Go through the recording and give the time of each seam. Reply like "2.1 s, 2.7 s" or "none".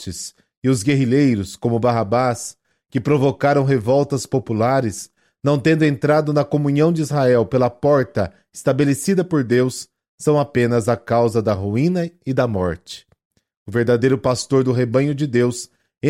none